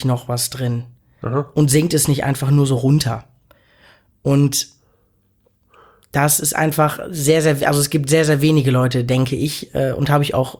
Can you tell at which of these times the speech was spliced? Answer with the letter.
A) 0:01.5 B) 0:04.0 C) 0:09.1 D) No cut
D